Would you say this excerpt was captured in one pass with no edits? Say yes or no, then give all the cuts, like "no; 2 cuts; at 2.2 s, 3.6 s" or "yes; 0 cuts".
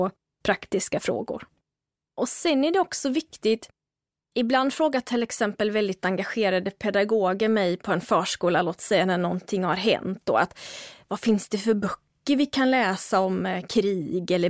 yes; 0 cuts